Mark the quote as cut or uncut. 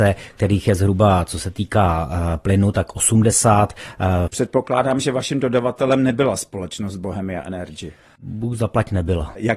cut